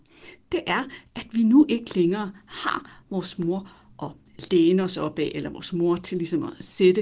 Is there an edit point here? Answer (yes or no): no